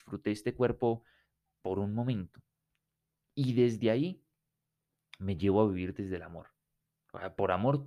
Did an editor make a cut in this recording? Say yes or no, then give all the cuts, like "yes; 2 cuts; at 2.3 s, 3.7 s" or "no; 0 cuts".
no; 0 cuts